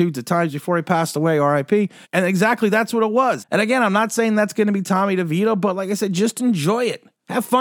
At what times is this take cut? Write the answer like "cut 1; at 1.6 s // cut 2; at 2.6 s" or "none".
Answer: cut 1; at 2.0 s // cut 2; at 3.4 s